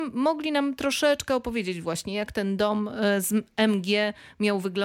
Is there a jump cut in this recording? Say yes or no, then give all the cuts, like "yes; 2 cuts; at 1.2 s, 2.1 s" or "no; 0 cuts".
no; 0 cuts